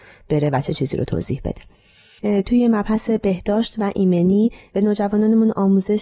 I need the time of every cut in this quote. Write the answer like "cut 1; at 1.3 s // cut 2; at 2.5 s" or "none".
none